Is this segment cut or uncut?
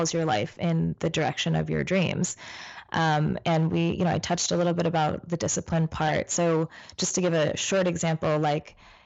uncut